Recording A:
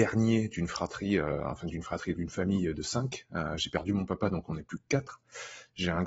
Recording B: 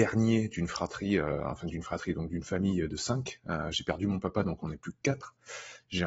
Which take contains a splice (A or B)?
A